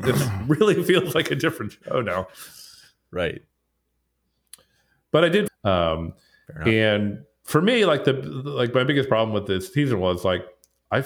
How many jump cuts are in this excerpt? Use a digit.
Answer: 1